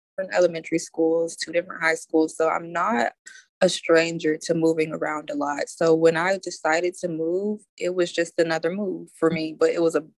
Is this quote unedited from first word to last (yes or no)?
no